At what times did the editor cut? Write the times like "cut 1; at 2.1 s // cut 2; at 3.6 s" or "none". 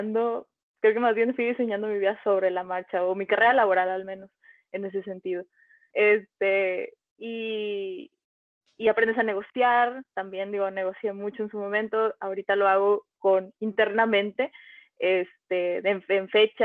cut 1; at 5.9 s